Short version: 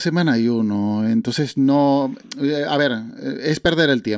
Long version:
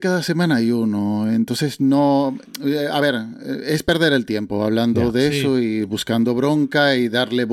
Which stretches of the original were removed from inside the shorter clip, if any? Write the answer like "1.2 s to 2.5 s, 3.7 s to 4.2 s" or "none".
none

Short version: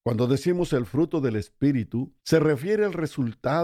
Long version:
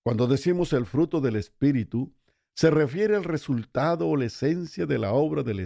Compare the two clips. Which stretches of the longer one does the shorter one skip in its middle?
2.2 s to 2.5 s

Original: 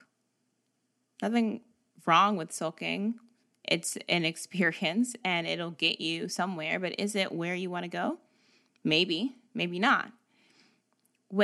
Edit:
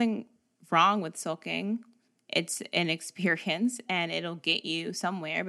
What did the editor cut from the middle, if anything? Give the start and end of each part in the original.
none

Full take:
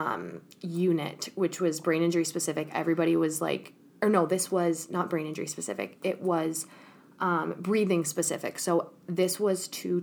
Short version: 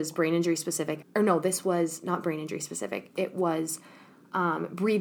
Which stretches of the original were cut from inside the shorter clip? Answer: 2.7 s to 3.9 s

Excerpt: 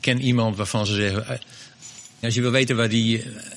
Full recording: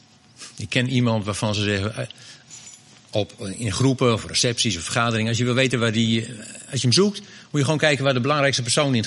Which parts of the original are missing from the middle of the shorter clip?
2.9 s to 5.3 s

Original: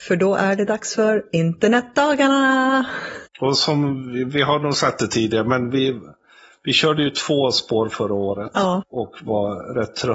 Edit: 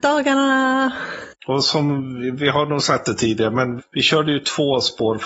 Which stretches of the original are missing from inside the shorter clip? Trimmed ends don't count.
5.7 s to 6.5 s

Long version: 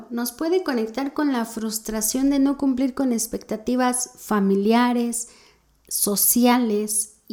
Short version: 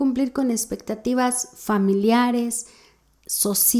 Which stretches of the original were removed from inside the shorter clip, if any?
none

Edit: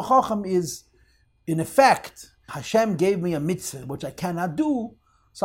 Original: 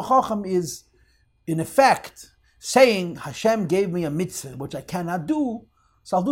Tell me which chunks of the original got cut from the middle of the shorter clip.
2.5 s to 3.2 s

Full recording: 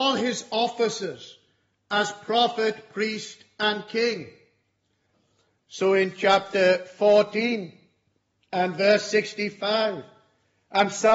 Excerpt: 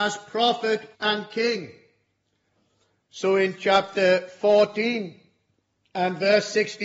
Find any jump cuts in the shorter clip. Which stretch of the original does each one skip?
2.9 s to 3.5 s

